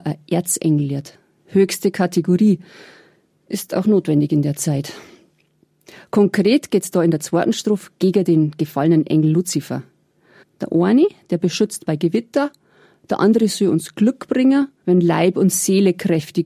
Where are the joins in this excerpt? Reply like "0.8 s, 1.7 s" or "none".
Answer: 10.4 s, 14.8 s

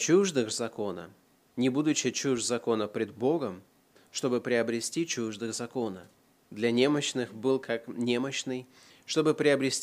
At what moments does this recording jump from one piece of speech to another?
1.4 s, 4.0 s

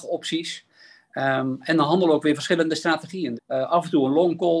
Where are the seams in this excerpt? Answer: 3.4 s

